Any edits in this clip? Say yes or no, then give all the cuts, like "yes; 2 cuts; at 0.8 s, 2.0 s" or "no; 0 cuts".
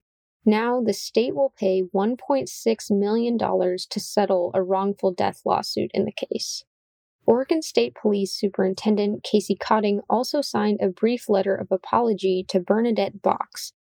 no; 0 cuts